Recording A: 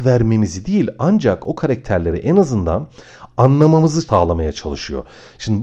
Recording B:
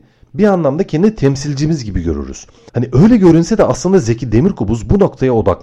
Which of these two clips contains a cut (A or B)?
B